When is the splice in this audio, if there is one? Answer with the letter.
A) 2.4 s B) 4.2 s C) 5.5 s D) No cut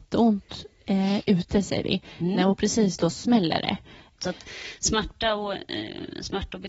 B